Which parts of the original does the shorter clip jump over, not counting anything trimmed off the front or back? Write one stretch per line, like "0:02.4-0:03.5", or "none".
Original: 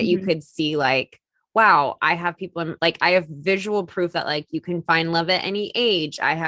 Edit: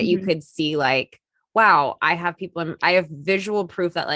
0:02.8-0:03.0

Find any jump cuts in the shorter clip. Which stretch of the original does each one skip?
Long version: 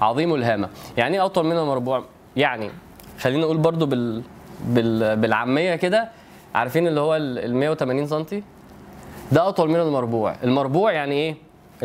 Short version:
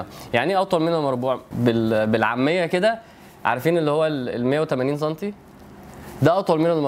0:02.1-0:04.6

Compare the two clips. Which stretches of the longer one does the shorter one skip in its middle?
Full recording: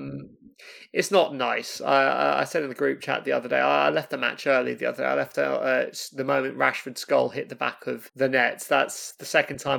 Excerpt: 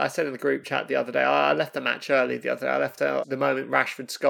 0:05.6-0:06.1

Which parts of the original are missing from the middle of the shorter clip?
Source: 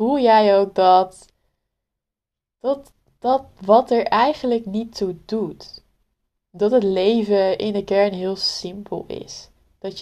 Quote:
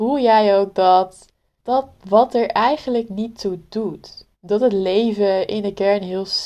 0:01.6-0:03.1
0:05.9-0:06.4

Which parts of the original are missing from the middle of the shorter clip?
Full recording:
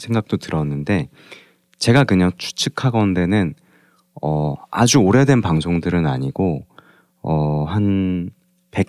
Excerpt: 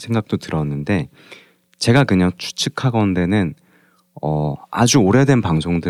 none

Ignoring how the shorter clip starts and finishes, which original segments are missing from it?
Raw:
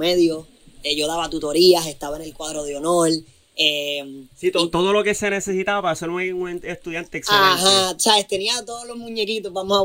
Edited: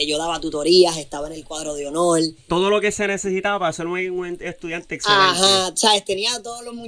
0:03.4-0:04.7

